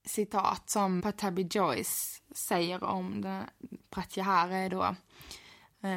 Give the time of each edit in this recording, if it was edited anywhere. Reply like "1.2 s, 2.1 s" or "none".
1.0 s